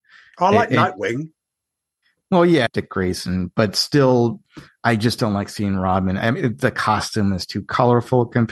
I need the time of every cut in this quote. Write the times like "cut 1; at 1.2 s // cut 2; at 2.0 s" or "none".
cut 1; at 2.7 s